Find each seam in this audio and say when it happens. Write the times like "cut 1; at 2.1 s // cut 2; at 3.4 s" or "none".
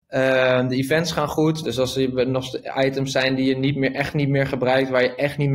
cut 1; at 1.6 s